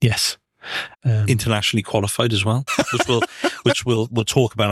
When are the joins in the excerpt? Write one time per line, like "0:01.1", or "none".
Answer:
0:00.9
0:02.7